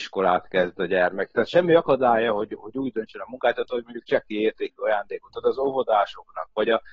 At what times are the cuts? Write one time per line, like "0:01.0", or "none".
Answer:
none

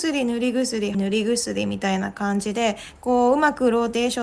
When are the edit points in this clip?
0:00.9

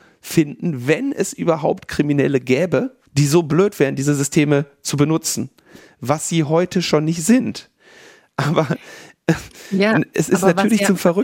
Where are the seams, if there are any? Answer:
0:03.1

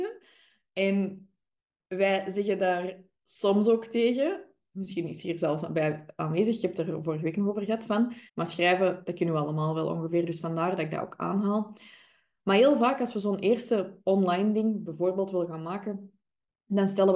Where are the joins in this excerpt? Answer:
0:08.3

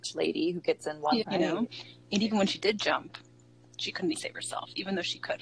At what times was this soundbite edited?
0:01.2
0:04.1

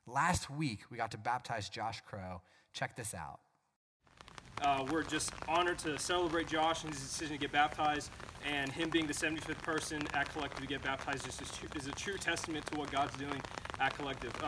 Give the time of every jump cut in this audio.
0:04.6

